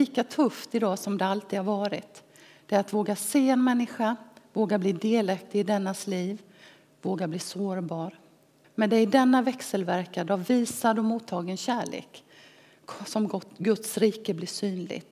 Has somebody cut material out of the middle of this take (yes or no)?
yes